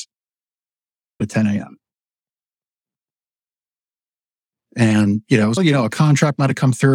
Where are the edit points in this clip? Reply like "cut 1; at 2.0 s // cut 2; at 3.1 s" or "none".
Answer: cut 1; at 1.2 s // cut 2; at 5.6 s